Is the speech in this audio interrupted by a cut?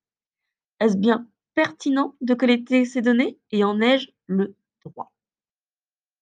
no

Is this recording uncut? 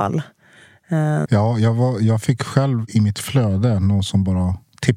no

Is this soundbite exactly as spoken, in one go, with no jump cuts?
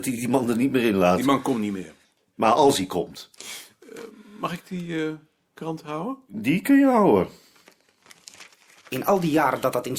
yes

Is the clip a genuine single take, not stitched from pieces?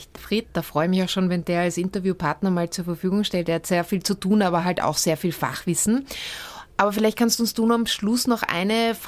yes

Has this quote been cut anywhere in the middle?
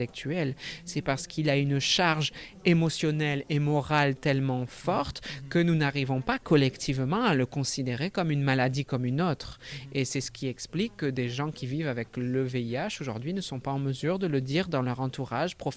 no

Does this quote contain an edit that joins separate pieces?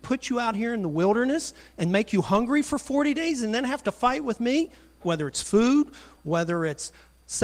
yes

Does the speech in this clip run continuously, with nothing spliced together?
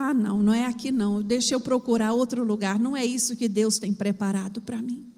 yes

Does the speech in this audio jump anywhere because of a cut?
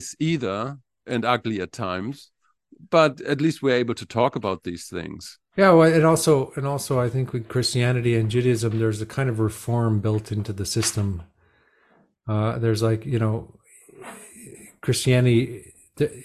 no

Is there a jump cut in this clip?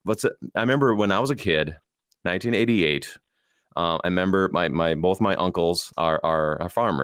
yes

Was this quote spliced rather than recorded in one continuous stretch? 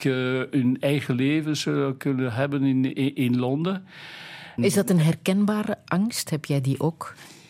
yes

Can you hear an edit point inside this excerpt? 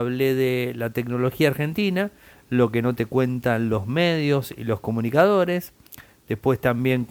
no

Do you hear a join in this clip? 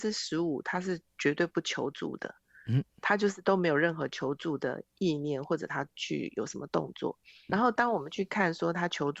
yes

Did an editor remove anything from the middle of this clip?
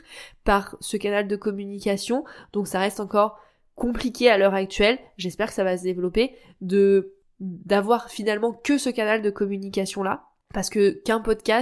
no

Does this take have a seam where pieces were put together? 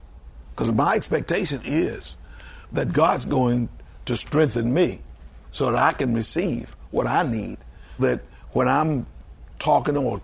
yes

